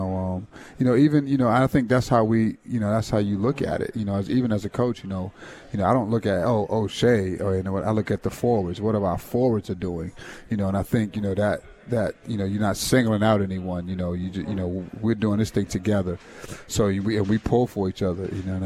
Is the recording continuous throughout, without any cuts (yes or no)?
yes